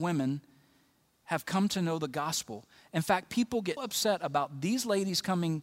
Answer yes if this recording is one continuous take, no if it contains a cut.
no